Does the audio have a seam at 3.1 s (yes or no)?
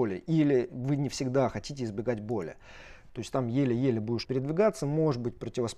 yes